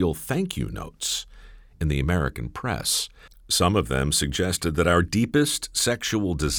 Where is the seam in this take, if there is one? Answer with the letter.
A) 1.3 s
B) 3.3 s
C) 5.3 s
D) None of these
B